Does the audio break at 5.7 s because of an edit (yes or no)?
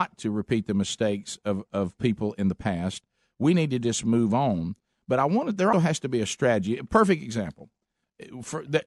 yes